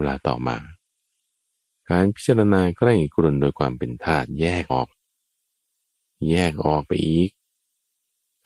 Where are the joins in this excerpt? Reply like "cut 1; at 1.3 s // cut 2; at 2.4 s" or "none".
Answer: cut 1; at 4.7 s